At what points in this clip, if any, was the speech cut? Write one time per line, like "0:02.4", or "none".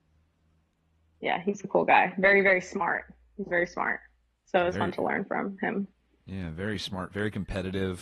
none